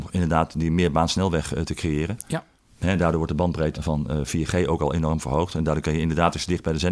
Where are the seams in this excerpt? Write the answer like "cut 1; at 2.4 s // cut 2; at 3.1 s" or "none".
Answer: cut 1; at 3.7 s